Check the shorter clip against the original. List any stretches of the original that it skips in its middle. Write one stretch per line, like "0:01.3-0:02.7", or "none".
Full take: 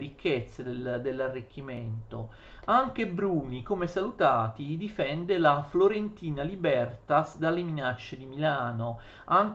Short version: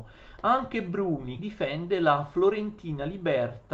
0:03.6-0:04.8

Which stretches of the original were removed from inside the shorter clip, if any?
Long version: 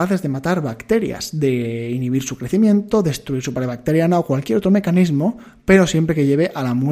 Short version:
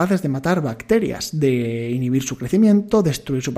none

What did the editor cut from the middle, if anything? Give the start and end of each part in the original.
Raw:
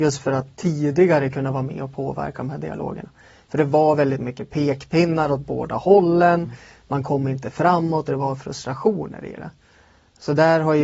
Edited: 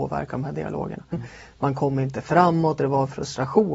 0:03.2-0:06.4

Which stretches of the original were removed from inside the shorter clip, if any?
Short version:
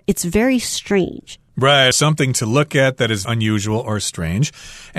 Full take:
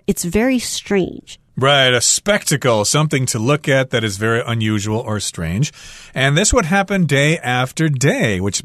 0:01.9-0:02.8
0:04.2-0:04.4

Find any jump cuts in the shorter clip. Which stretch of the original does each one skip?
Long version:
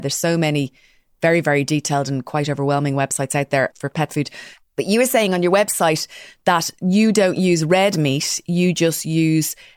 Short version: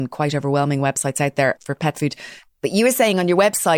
none

